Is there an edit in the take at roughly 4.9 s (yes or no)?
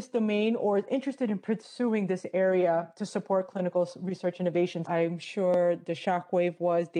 yes